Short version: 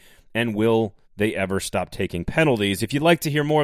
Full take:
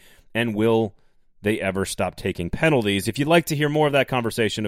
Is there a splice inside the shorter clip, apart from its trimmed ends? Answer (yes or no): yes